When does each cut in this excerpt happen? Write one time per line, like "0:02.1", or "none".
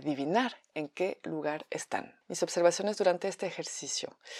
none